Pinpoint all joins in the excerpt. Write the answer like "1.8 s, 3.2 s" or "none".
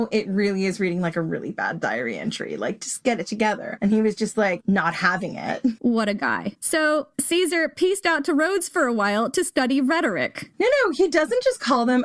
5.8 s, 7.1 s, 10.5 s